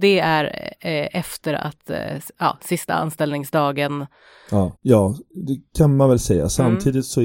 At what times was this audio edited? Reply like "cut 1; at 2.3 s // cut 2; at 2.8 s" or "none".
cut 1; at 4.8 s